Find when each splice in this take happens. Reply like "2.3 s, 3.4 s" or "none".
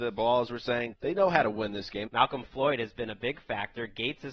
0.9 s, 2.1 s